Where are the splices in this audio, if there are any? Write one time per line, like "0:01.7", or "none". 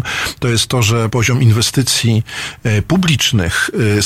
0:01.1